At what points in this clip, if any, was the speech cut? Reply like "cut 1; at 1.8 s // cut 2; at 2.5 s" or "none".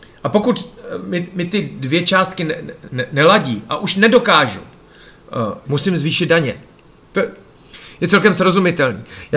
cut 1; at 5.6 s